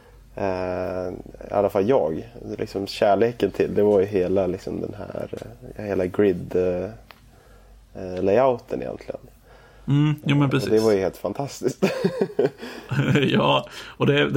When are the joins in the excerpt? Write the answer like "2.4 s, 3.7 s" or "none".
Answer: none